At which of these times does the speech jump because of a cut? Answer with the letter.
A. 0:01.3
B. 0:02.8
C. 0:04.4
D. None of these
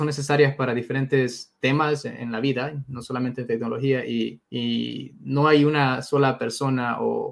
C